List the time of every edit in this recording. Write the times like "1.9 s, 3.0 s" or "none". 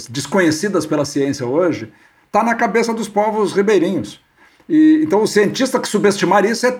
none